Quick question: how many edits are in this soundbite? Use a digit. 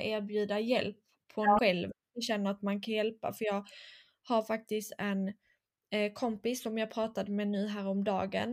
1